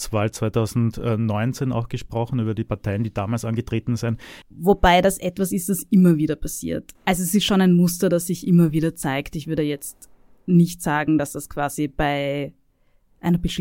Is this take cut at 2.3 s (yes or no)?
no